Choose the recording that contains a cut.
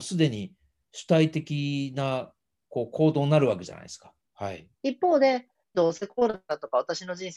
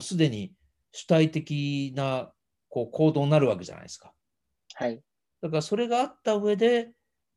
first; 2 cuts; at 4.2 s, 5.7 s

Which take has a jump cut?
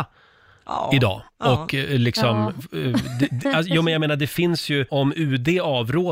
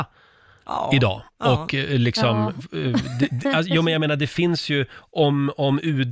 first; 1 cut; at 4.9 s

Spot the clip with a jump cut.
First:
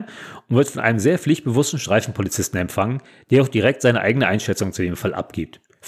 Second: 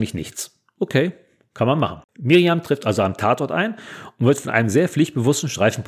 second; 1 cut; at 2.1 s

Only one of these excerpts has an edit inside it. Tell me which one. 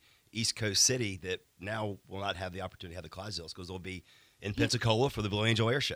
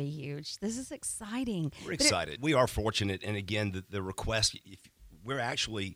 second; 1 cut; at 2.4 s

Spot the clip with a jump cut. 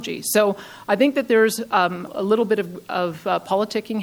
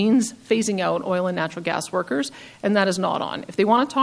first; 1 cut; at 2.1 s

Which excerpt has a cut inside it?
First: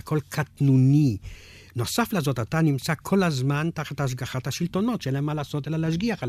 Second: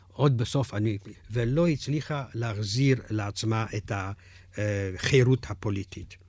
second; 1 cut; at 1.1 s

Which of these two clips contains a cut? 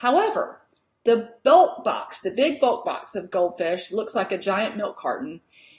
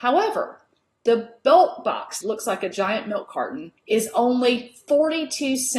second; 2 cuts; at 2.2 s, 3.8 s

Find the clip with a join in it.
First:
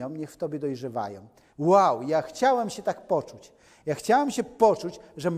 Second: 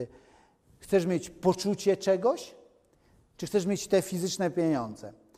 first; 1 cut; at 1.5 s

